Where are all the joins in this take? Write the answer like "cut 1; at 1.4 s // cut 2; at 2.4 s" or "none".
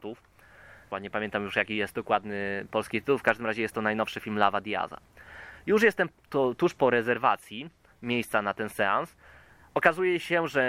cut 1; at 0.9 s